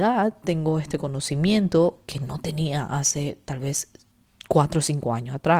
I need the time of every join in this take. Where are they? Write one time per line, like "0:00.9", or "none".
none